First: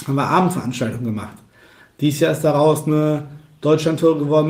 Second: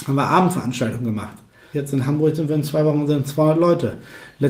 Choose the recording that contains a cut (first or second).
second